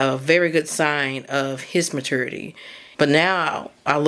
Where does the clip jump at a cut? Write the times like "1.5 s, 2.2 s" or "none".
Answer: 2.9 s